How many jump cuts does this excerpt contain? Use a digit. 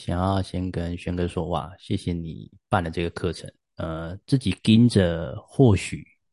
1